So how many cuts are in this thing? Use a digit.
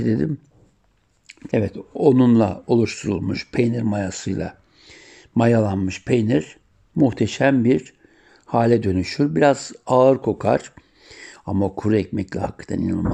1